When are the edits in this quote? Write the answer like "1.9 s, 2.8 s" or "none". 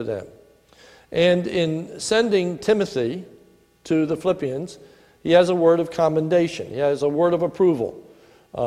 none